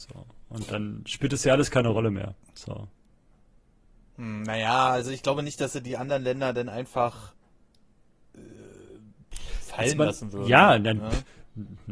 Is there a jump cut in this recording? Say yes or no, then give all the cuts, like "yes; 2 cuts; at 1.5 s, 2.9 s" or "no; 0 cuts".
no; 0 cuts